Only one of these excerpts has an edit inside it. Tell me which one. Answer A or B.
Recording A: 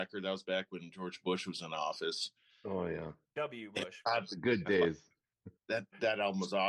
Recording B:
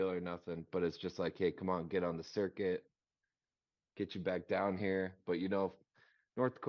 A